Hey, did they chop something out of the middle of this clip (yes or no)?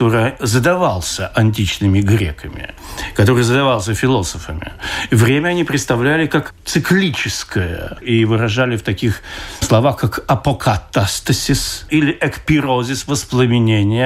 yes